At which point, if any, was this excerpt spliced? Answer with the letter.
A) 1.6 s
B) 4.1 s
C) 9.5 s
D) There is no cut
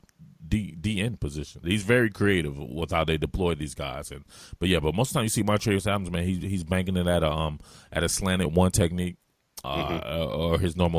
A